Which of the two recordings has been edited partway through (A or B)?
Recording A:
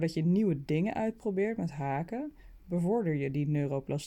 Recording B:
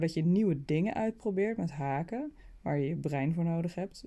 A